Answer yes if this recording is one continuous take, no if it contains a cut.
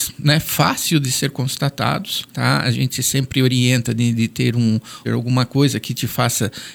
no